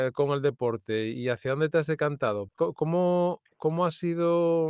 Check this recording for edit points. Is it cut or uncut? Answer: cut